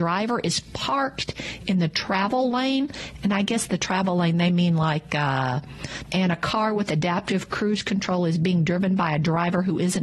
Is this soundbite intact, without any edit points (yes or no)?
no